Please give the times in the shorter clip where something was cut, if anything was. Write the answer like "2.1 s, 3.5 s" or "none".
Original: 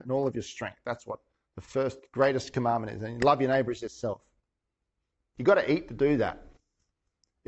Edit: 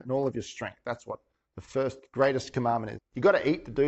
2.9 s

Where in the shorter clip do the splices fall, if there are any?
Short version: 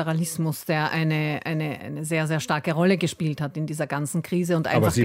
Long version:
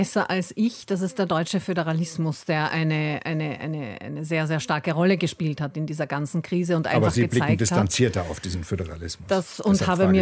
1.8 s

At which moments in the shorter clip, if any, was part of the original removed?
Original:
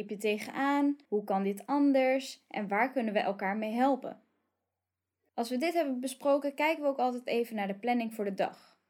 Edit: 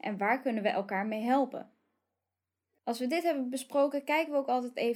none

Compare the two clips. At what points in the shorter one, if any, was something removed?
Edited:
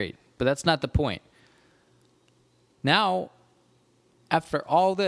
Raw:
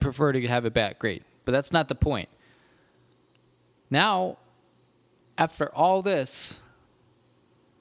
none

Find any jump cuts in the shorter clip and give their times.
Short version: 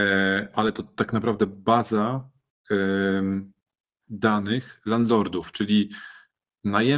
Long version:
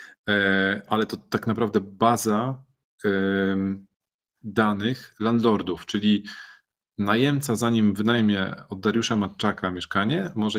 none

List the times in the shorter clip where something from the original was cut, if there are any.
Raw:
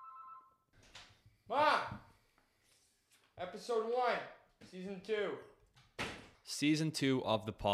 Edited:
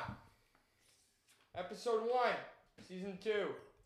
none

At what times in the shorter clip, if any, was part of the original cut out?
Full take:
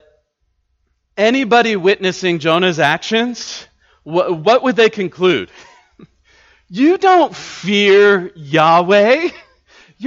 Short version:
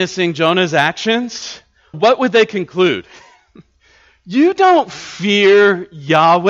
1.9 s

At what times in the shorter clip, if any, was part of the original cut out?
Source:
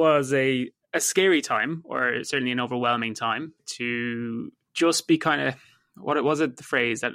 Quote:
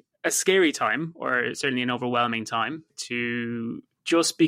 none

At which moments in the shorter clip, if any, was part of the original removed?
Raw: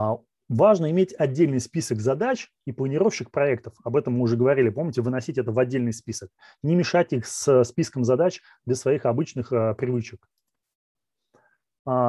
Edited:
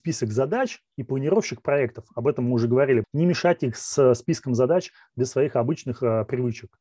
3.0 s

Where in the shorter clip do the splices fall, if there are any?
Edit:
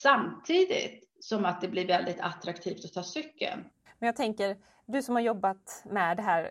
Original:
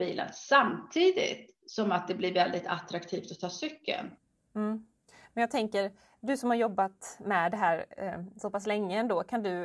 3.9 s

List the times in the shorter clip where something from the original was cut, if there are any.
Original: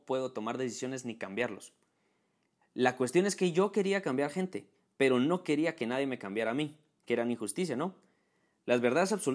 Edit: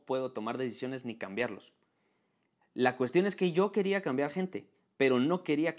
none

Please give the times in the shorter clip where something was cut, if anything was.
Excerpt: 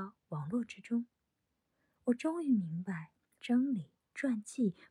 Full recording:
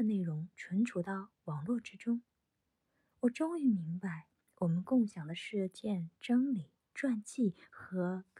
3.4 s

